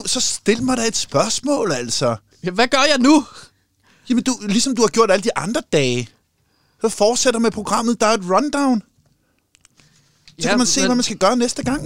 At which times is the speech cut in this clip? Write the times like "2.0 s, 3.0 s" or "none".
none